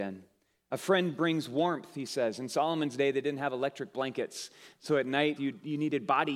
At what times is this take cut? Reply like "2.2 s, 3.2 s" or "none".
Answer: 5.4 s